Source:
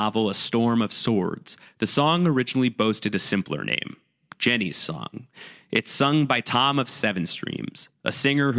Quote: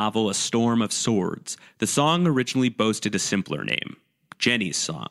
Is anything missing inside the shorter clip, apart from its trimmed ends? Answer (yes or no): no